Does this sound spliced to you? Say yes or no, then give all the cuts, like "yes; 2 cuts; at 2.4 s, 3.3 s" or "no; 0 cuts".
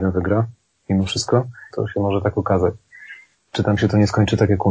yes; 2 cuts; at 1.7 s, 3.3 s